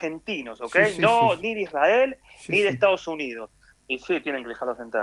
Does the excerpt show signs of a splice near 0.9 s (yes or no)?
no